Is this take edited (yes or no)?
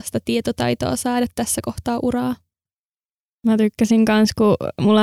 no